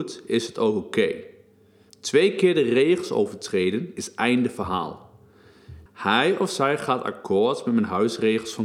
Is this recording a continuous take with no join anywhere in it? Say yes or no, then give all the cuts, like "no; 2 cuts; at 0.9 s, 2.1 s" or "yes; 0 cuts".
no; 2 cuts; at 1.9 s, 5.9 s